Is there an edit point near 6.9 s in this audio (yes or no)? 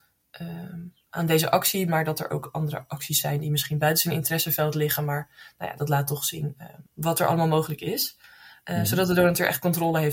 yes